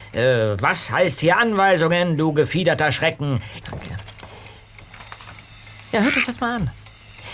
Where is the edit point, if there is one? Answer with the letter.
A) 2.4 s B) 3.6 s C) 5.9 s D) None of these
B